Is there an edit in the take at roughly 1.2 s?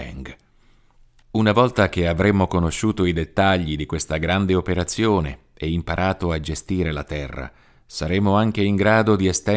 yes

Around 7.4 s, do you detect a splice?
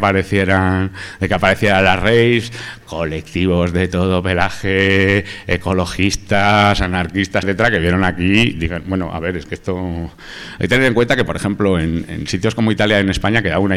yes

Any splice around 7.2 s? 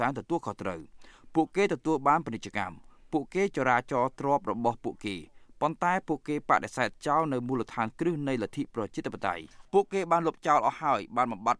no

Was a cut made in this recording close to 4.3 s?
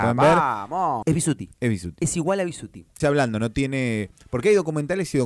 no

